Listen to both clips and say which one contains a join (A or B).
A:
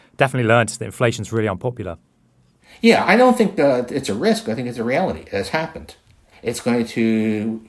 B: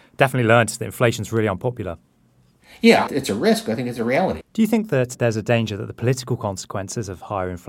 B